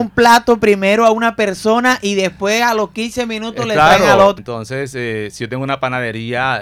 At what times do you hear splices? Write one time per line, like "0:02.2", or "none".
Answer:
0:04.4